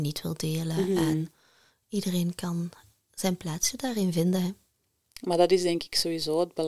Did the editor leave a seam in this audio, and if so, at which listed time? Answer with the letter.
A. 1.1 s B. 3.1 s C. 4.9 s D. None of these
D